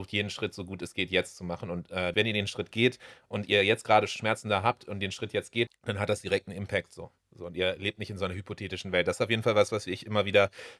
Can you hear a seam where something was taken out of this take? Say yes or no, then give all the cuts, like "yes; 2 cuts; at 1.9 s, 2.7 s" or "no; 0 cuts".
yes; 2 cuts; at 2.1 s, 5.7 s